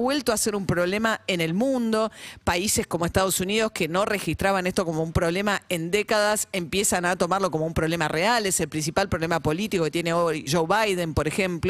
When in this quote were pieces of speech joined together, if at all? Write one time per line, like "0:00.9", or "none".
0:10.5